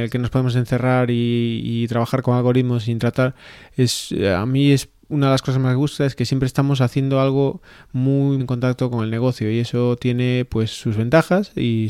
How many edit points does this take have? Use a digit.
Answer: 1